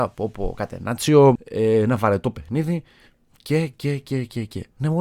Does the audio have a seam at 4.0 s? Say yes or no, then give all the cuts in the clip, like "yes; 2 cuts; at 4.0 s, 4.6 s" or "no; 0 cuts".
no; 1 cut; at 1.4 s